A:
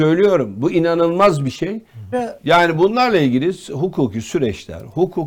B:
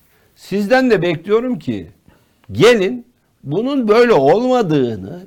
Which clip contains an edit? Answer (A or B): A